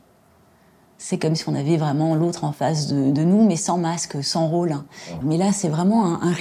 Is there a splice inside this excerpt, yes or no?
yes